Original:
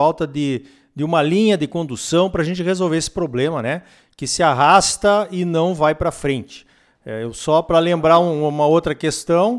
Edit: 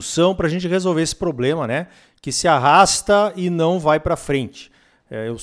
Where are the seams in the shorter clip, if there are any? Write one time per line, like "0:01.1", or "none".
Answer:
none

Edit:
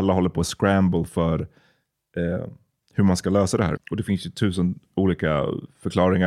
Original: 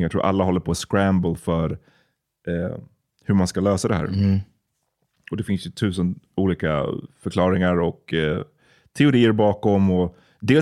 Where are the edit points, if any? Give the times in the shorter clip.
0:03.8

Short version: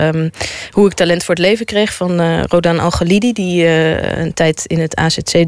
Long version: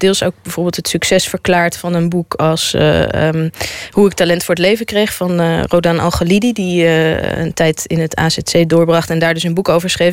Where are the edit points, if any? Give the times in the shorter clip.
none

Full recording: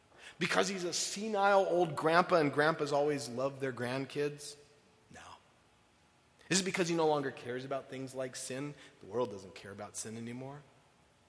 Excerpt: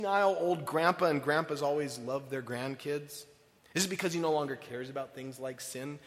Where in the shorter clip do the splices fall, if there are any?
0:03.6

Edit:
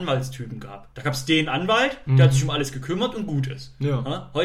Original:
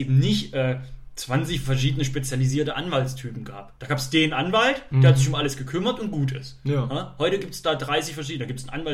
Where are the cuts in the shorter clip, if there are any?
none

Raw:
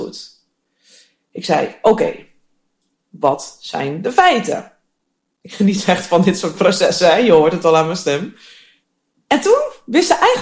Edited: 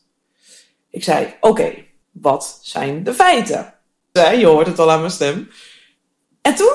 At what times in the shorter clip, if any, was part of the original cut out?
0:02.0
0:04.2

